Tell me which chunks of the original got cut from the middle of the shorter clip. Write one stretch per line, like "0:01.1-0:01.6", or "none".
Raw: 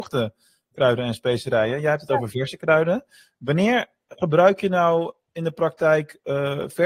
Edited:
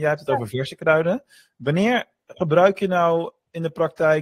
none

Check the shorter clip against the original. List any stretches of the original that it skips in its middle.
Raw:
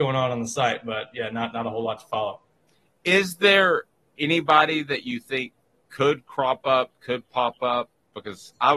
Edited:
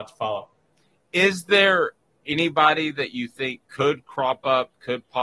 0:05.6-0:05.9

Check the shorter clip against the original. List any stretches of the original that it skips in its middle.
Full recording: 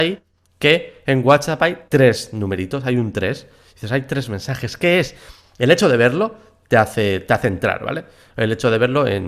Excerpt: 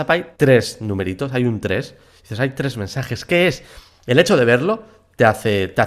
none

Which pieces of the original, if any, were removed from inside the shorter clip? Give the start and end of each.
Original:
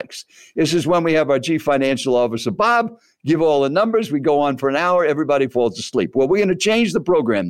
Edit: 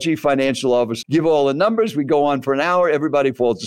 0:02.4-0:03.2

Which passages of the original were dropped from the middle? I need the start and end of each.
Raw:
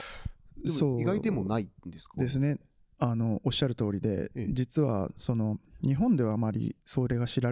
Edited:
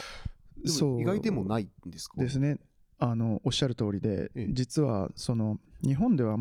none

